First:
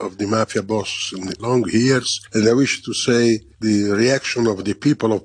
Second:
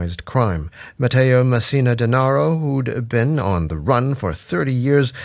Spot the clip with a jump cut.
first; 1 cut; at 1.4 s

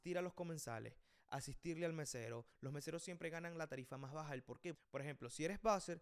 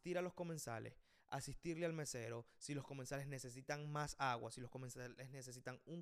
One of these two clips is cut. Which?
first; 2 cuts; at 2.5 s, 4.7 s

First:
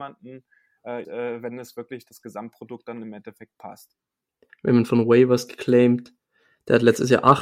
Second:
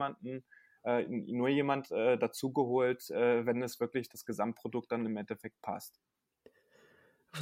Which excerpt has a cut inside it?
first; 2 cuts; at 1.0 s, 4.5 s

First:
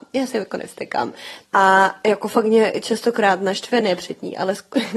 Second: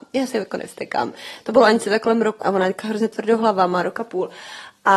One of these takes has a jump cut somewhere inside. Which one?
first; 2 cuts; at 1.4 s, 3.8 s

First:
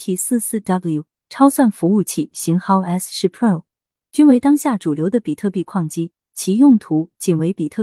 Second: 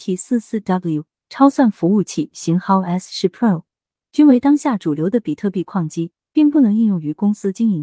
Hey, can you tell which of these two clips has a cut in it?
second; 1 cut; at 6.2 s

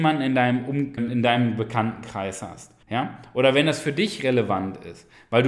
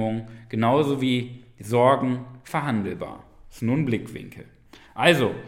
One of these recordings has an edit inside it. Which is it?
first; 2 cuts; at 1.0 s, 2.8 s

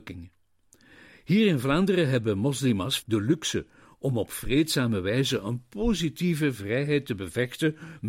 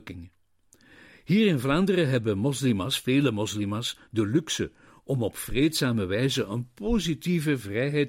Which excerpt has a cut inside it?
first; 1 cut; at 3.0 s

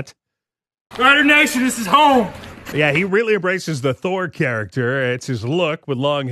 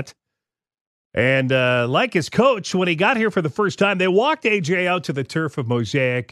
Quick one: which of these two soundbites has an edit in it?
first; 2 cuts; at 0.9 s, 2.7 s

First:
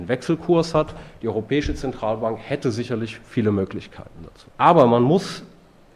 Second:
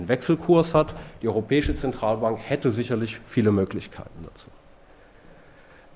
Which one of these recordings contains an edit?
first; 1 cut; at 4.5 s

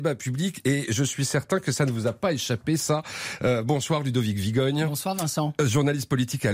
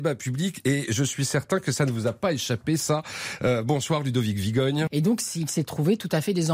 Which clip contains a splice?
second; 1 cut; at 4.9 s

